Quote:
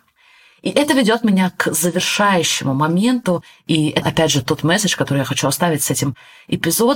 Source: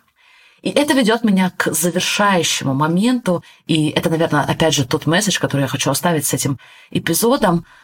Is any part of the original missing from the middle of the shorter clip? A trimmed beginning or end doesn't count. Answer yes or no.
yes